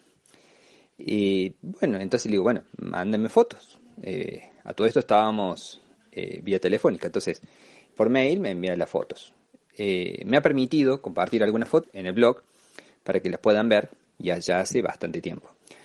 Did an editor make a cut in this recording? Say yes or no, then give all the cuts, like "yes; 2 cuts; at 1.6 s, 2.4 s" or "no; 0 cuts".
yes; 2 cuts; at 11.8 s, 14.0 s